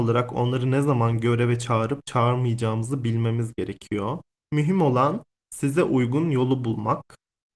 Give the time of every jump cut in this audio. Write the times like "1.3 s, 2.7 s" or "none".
4.4 s

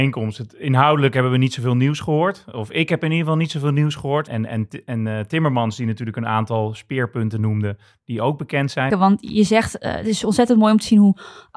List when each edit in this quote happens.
4.3 s, 8.9 s

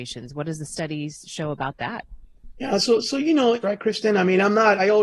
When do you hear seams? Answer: 3.6 s

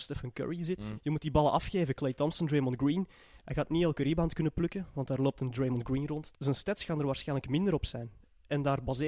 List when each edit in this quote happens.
1.0 s, 6.3 s

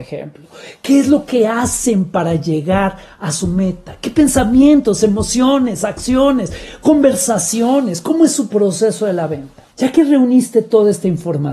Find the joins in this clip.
9.7 s

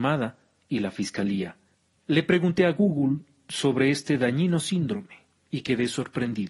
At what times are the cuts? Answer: 2.0 s

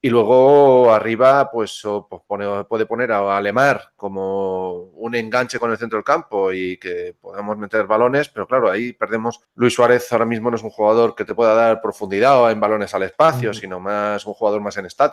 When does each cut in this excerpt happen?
9.4 s

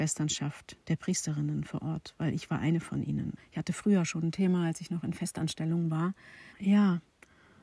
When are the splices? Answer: 3.4 s, 6.5 s

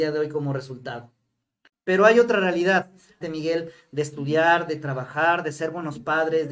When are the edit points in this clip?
1.7 s, 3.2 s

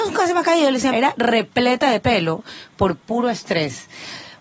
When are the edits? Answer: 0.9 s

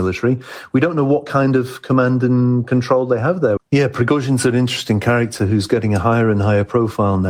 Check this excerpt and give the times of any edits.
3.6 s

